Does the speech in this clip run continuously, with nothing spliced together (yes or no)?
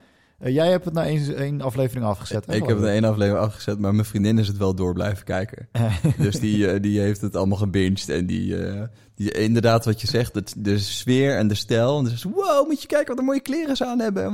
yes